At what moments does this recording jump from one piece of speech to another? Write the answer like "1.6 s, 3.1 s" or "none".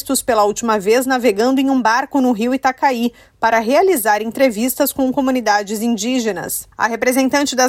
none

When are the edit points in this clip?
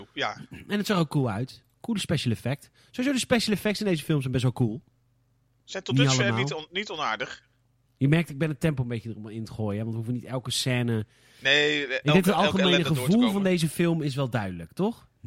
7.9 s

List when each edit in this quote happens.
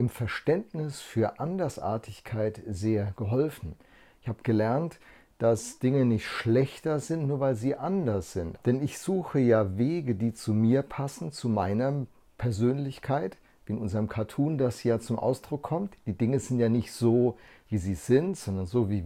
8.6 s

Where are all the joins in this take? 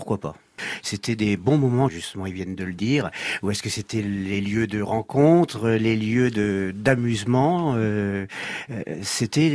1.9 s

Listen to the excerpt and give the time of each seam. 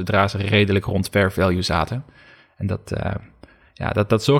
none

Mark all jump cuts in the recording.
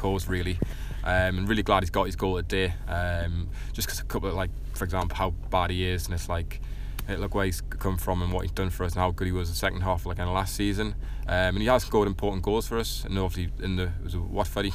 5.1 s

